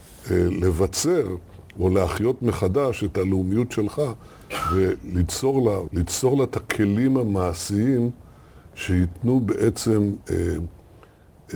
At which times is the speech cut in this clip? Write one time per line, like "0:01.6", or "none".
0:05.9